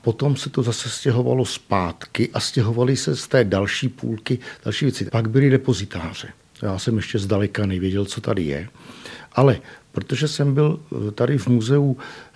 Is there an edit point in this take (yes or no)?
yes